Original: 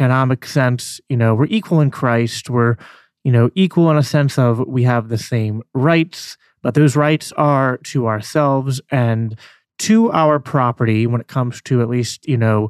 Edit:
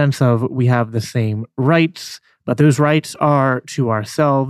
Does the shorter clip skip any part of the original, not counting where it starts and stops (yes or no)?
no